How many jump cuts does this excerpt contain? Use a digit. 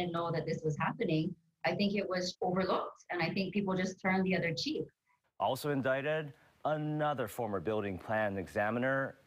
2